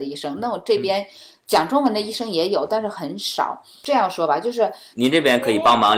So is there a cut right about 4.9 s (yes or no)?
yes